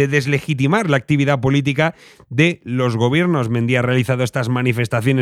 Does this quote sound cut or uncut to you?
uncut